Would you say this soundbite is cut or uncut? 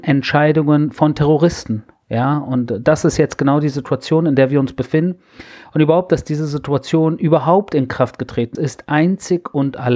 cut